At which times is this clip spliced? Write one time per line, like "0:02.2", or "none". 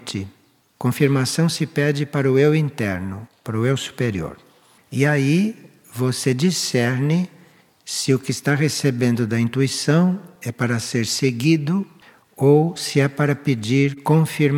0:04.8